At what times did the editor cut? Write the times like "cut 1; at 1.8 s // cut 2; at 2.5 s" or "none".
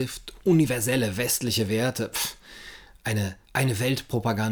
cut 1; at 3.4 s

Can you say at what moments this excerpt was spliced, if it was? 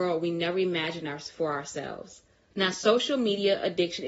cut 1; at 2.5 s

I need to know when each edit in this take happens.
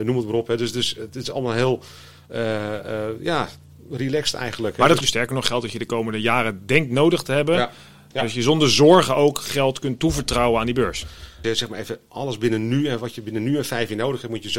cut 1; at 5.0 s // cut 2; at 8.1 s // cut 3; at 11.4 s

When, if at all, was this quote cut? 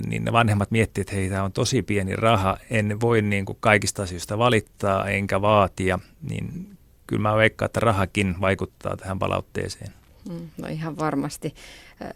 none

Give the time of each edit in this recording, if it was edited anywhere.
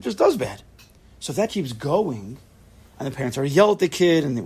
cut 1; at 1.5 s

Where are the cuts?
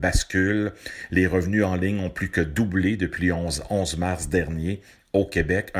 none

